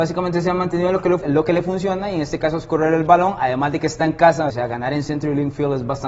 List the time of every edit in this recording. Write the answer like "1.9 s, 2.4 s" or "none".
1.2 s, 4.5 s

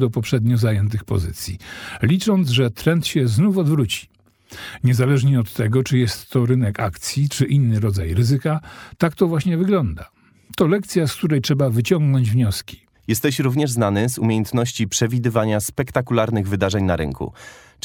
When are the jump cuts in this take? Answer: 12.9 s

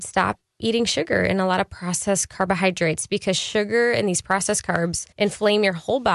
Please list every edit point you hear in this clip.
5.1 s

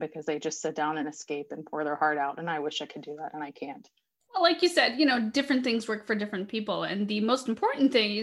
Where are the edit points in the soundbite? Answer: none

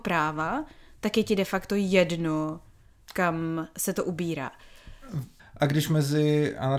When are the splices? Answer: 5.4 s

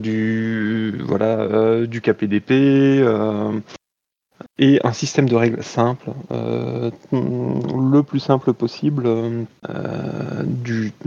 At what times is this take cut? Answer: 4.5 s, 9.6 s

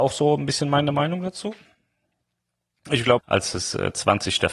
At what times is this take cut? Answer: 3.2 s

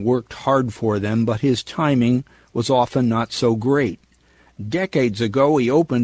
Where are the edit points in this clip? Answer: none

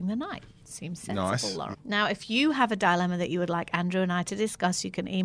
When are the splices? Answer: 1.7 s

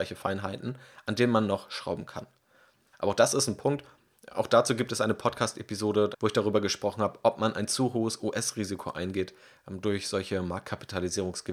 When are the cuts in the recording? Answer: 2.9 s, 6.1 s

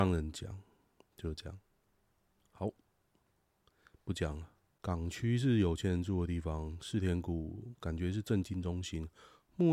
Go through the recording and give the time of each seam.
4.7 s

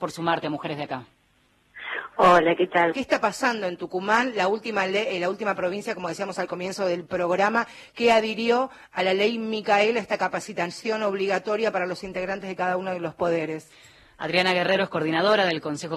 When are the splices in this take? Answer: 2.9 s

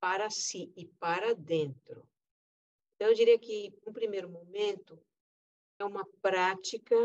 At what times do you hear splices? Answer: 3.8 s, 5.8 s

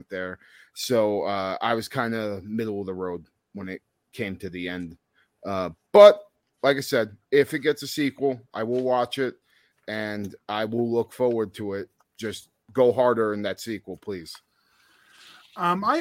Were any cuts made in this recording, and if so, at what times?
none

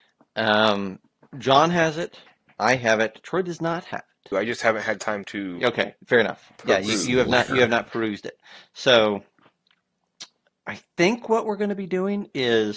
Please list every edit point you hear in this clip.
4.3 s

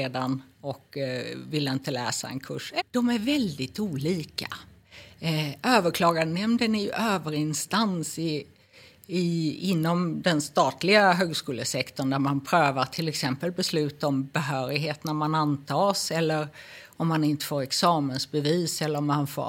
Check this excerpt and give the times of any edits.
2.8 s

